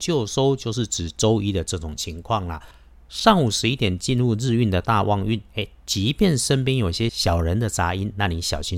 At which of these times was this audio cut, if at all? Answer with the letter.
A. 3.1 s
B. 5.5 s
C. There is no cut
B